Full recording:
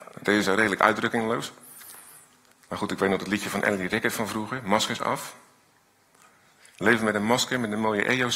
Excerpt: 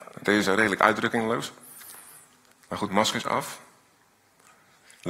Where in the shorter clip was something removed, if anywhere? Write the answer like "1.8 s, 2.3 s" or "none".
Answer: 2.9 s